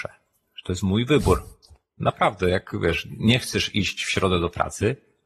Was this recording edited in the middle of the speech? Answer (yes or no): no